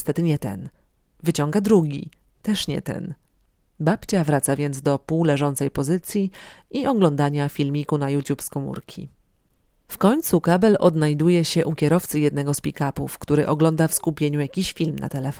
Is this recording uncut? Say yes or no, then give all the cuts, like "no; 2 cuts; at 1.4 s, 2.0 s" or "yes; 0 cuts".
yes; 0 cuts